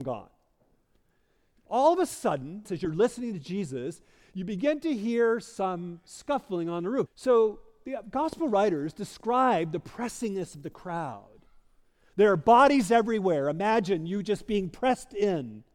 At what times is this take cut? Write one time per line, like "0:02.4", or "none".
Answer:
0:02.7
0:07.1